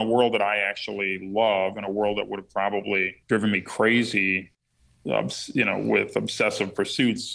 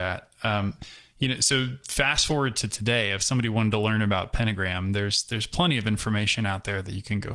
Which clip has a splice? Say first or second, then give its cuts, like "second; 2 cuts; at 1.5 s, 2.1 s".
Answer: first; 1 cut; at 3.2 s